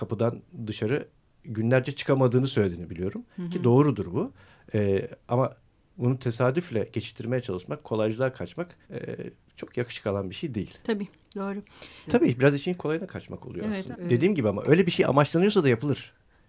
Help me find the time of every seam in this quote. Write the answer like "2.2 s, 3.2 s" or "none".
8.8 s, 12.1 s, 13.9 s